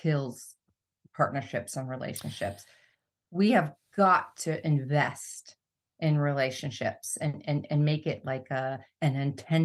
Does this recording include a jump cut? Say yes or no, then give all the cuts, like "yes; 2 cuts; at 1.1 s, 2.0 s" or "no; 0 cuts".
no; 0 cuts